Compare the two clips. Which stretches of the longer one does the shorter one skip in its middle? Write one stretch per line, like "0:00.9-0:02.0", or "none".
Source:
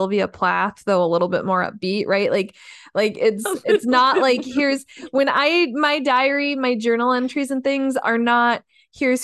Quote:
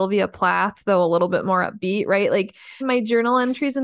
0:02.8-0:06.5